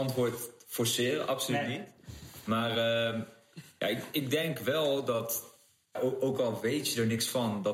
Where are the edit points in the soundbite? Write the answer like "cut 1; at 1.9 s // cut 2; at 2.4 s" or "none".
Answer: cut 1; at 6.0 s